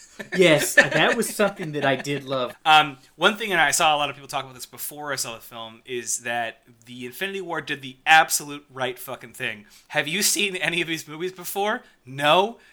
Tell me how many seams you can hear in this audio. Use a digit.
2